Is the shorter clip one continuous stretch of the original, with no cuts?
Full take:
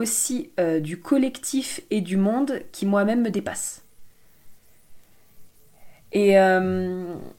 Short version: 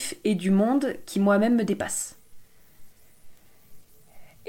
yes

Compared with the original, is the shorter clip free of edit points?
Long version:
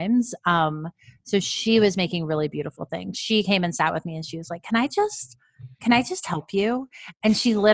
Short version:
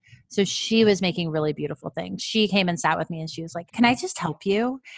no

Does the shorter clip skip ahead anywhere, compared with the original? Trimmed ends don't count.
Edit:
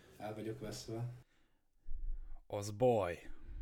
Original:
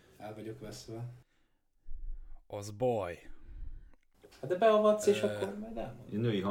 no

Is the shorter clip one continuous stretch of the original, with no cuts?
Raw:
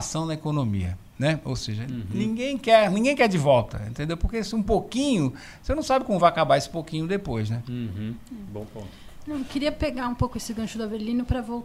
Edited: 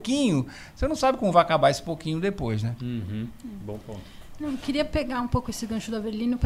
yes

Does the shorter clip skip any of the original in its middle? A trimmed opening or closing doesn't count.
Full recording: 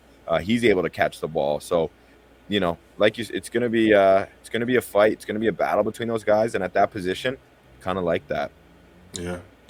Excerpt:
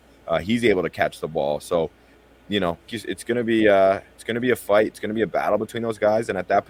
yes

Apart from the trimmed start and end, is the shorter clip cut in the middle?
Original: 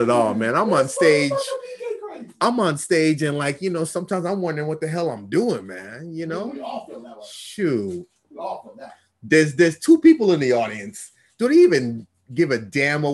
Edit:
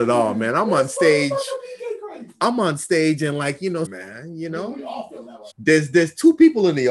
yes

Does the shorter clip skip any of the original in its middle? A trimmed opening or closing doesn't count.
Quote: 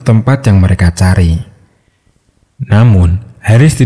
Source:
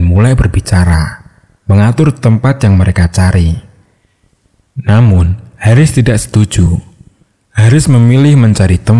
no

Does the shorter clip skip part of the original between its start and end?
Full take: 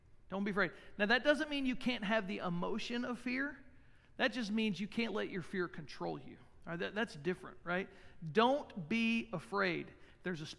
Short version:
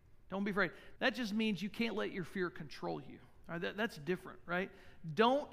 yes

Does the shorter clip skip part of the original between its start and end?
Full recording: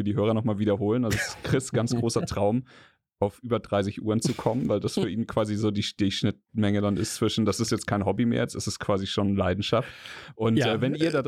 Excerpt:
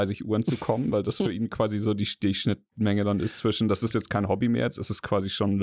no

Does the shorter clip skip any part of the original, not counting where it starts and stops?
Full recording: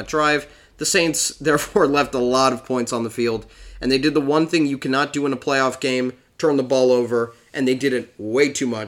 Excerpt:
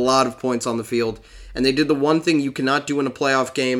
no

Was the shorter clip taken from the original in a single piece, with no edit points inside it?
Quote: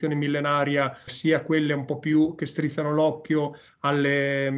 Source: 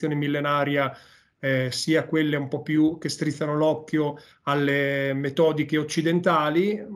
no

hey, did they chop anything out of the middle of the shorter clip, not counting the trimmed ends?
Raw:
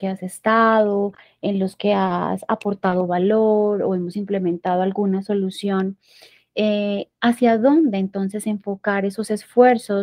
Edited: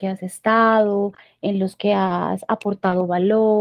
no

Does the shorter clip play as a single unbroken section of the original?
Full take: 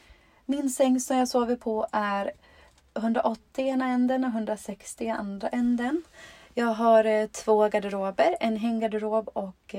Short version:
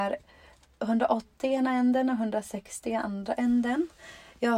yes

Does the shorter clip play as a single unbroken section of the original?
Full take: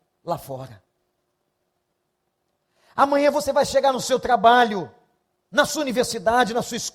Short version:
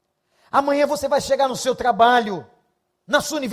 yes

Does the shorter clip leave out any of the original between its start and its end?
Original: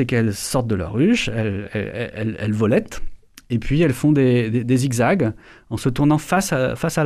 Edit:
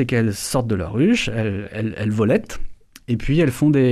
yes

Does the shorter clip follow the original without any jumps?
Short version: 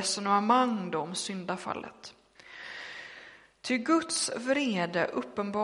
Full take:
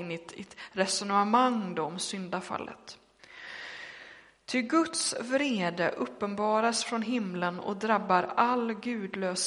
yes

